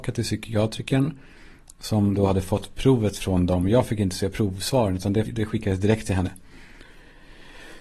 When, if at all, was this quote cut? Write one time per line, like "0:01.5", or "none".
0:05.3